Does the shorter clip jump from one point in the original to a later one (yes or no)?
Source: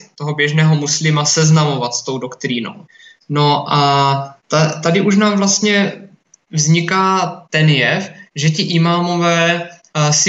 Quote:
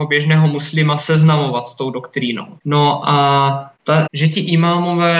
yes